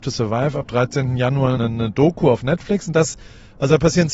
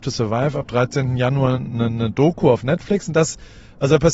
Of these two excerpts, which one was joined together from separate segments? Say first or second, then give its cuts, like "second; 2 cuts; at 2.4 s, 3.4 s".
first; 1 cut; at 1.6 s